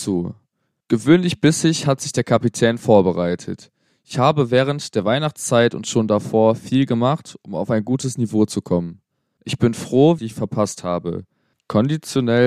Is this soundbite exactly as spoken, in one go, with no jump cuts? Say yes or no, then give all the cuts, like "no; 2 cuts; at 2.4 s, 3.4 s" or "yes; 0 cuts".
no; 1 cut; at 10.2 s